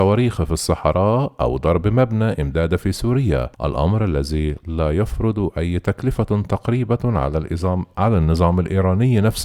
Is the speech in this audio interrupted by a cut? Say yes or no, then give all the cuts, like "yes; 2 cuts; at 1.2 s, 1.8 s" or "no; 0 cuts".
yes; 1 cut; at 3.5 s